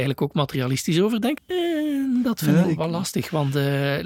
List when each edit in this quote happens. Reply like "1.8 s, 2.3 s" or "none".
1.4 s, 2.6 s